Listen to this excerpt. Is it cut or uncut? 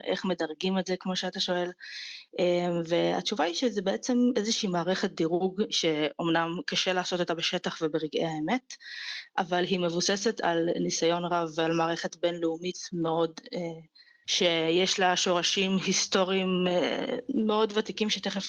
cut